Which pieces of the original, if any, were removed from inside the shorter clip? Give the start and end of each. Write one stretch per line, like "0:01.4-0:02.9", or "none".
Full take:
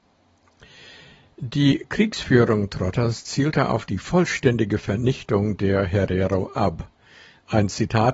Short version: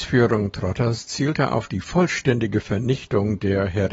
none